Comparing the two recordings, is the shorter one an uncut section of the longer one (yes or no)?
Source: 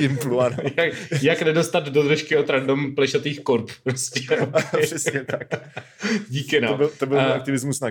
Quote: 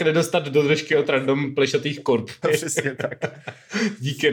no